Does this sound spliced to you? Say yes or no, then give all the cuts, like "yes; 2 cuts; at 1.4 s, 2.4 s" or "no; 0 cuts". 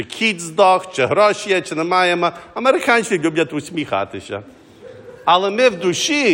no; 0 cuts